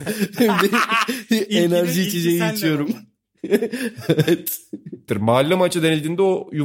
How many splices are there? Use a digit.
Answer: 1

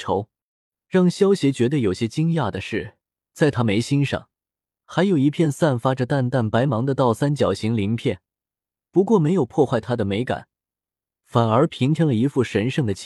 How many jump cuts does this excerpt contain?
0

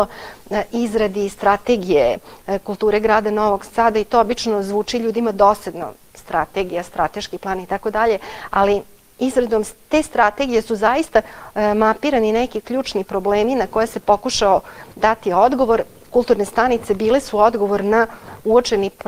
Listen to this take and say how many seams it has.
0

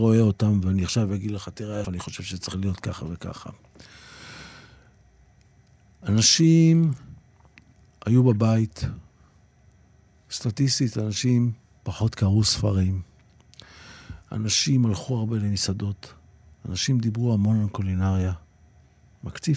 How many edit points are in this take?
1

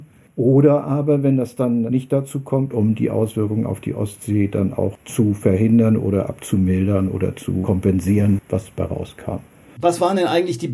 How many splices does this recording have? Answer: 2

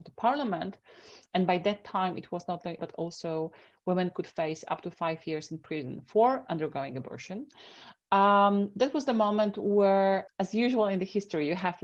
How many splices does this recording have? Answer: 2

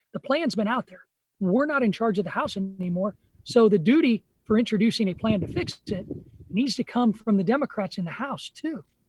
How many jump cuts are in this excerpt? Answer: 1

